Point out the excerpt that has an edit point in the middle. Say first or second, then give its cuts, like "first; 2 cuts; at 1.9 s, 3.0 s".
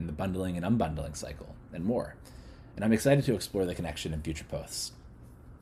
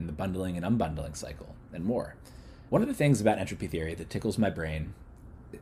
second; 1 cut; at 2.7 s